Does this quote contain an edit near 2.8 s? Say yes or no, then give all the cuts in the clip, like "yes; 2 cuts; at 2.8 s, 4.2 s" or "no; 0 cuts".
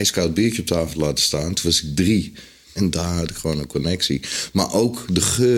yes; 1 cut; at 2.8 s